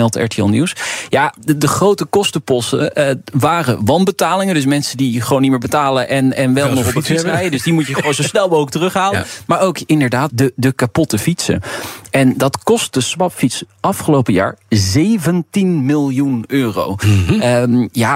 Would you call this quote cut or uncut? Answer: cut